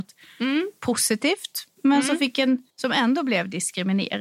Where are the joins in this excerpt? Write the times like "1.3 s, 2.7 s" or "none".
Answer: 2.7 s